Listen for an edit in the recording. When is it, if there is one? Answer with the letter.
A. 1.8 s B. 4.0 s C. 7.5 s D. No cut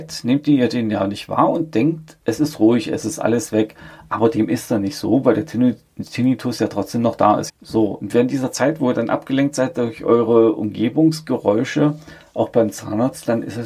C